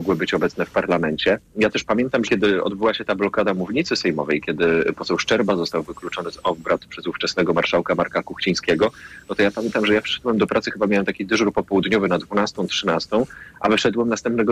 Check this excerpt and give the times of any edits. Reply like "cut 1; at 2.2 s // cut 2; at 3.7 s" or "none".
cut 1; at 2.3 s